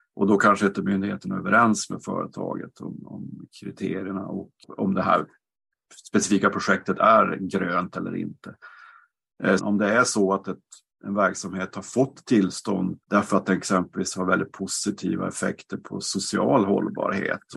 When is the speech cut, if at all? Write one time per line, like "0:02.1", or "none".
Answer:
0:09.6
0:13.0